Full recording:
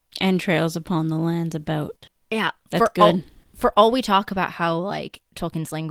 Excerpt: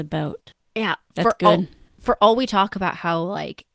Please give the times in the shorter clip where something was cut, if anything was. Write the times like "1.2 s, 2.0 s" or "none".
none